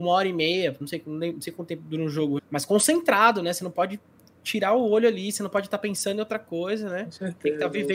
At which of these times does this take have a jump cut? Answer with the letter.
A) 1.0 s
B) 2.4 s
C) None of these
B